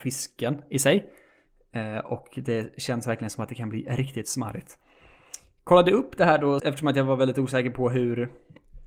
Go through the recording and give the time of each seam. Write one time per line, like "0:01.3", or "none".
0:06.6